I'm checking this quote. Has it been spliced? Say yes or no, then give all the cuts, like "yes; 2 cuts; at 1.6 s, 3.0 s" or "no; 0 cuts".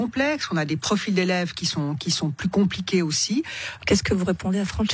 yes; 1 cut; at 3.8 s